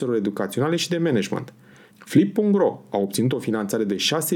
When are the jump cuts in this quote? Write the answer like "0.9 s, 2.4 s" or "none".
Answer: 1.9 s